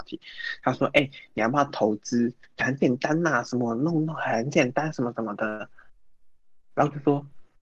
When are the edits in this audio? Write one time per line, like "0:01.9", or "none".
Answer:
none